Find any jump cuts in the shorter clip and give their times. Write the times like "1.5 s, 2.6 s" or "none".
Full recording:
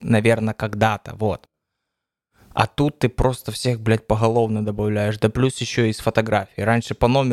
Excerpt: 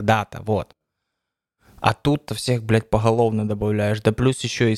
2.3 s